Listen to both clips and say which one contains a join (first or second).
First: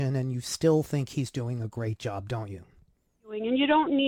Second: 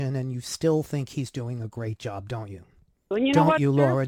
second